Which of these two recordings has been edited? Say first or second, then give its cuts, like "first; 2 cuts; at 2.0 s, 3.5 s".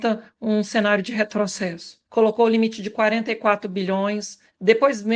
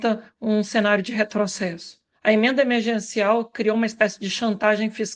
first; 1 cut; at 2.1 s